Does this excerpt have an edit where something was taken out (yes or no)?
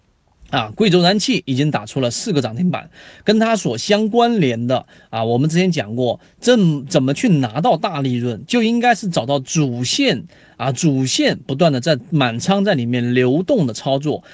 no